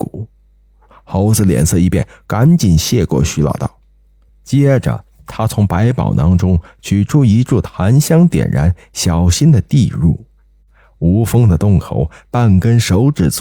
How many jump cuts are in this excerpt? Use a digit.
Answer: 1